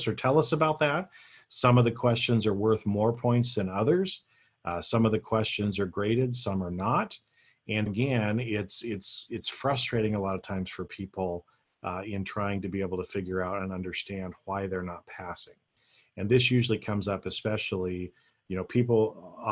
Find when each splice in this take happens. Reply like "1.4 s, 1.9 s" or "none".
7.9 s